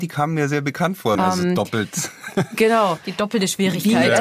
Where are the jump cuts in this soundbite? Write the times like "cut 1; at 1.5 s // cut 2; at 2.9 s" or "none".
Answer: cut 1; at 1.2 s